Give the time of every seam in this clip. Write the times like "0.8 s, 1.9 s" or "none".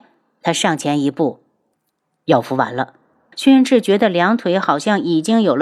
3.3 s

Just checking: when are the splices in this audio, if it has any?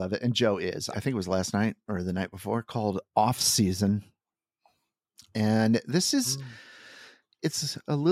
0.9 s

